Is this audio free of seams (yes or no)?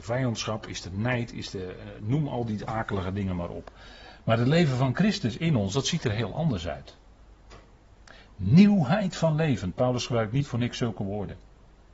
yes